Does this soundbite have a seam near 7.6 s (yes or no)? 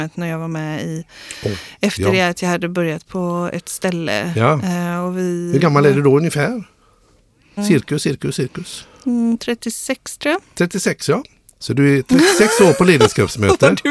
yes